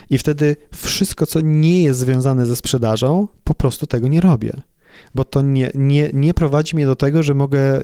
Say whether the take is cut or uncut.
uncut